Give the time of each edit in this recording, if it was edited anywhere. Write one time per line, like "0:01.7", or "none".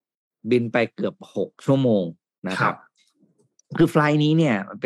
none